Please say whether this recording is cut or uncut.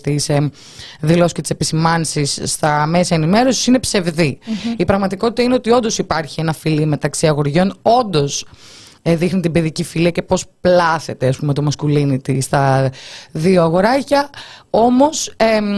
uncut